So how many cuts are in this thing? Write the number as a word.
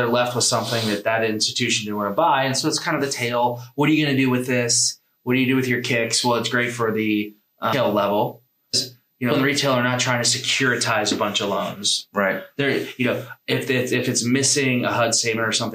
zero